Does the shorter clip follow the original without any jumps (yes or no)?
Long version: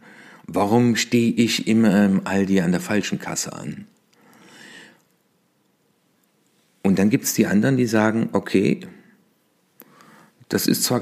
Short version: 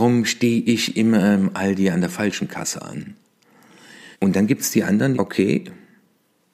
no